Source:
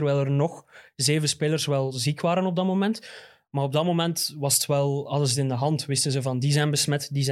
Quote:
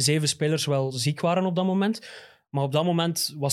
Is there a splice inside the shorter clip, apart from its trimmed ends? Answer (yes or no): no